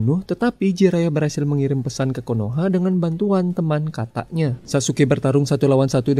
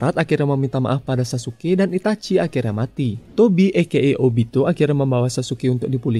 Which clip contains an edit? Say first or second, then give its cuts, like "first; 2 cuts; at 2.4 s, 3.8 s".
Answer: first; 1 cut; at 4.6 s